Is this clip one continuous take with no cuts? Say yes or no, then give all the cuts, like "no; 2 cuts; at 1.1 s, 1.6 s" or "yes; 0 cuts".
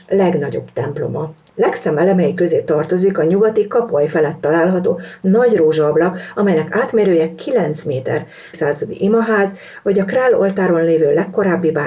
no; 1 cut; at 8.5 s